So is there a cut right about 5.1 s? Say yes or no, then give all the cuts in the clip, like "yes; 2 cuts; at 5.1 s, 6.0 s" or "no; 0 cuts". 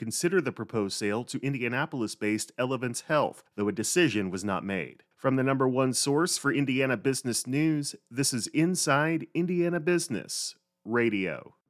yes; 1 cut; at 5.1 s